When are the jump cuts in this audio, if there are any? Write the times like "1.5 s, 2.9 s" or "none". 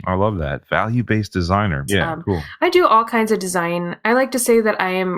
1.9 s